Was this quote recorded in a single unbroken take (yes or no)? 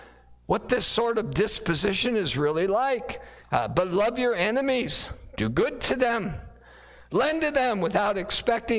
no